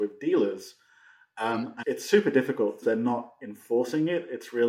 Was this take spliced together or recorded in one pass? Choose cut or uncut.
cut